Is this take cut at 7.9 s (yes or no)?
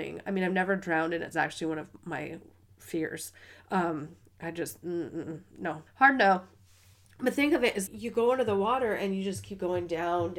yes